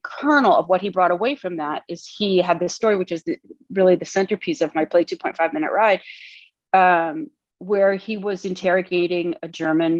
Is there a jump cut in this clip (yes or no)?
no